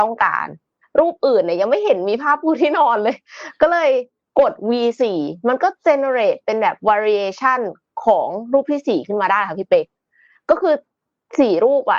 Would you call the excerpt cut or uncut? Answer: uncut